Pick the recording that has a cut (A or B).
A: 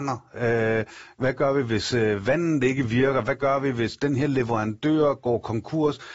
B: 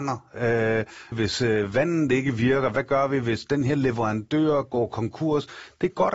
B